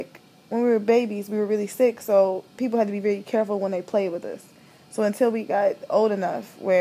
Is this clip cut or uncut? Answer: uncut